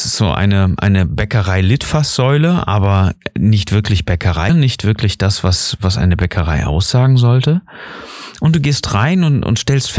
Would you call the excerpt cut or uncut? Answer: cut